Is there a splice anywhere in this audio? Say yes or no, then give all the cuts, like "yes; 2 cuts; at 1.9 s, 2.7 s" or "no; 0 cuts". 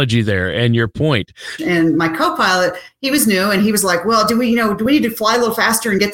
yes; 1 cut; at 1.6 s